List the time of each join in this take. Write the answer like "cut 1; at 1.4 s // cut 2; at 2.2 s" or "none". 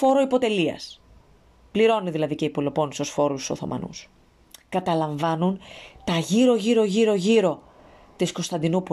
none